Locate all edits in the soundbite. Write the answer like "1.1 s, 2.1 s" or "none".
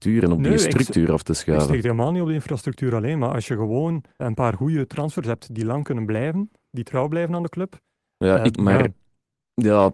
4.2 s, 8.5 s